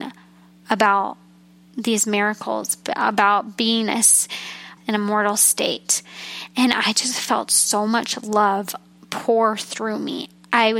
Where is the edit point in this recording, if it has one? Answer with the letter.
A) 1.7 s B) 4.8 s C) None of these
B